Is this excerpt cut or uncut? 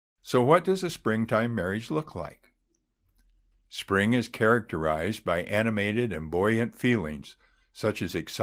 uncut